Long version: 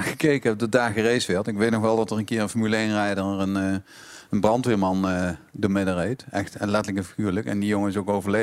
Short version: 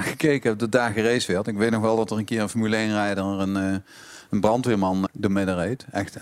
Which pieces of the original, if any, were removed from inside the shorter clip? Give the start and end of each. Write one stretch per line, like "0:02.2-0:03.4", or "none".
0:05.1-0:05.5